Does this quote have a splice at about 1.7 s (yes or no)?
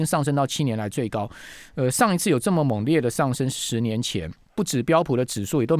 no